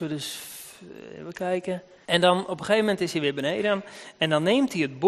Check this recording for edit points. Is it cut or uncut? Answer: cut